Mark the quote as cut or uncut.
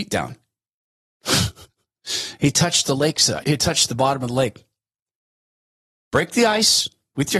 cut